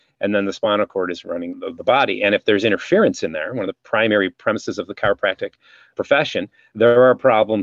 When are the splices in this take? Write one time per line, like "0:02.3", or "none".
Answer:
0:01.5
0:05.9